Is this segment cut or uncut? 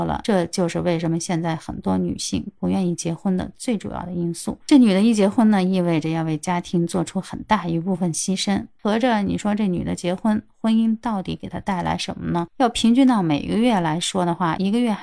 cut